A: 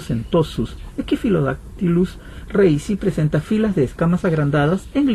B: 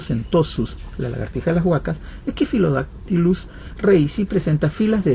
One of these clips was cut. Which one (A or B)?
A